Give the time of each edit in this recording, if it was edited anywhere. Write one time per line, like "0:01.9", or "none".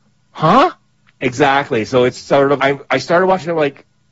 0:01.1
0:02.6